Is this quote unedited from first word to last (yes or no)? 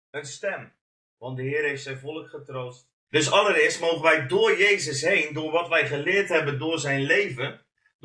no